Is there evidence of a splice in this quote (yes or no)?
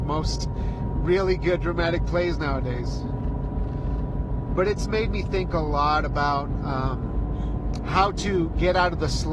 no